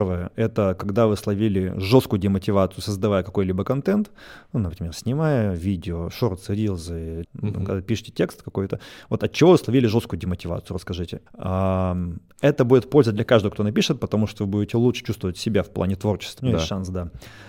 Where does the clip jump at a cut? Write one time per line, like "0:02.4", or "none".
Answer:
0:07.2
0:11.3
0:16.4